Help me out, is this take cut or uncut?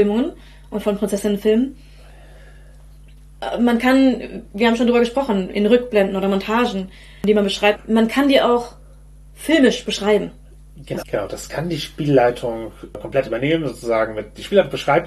cut